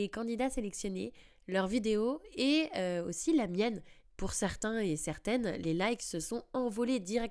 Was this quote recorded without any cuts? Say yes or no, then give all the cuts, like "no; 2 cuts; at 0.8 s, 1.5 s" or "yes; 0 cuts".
no; 1 cut; at 4.1 s